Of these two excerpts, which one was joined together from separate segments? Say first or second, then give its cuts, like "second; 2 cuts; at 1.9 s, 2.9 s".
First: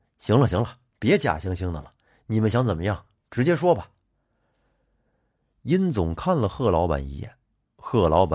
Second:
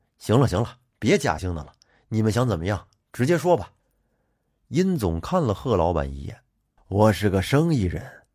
second; 3 cuts; at 1.4 s, 3.8 s, 6.8 s